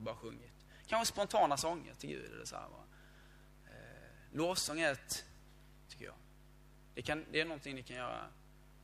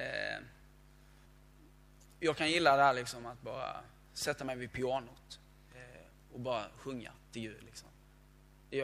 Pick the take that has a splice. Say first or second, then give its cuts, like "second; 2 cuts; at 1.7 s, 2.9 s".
first; 1 cut; at 5.9 s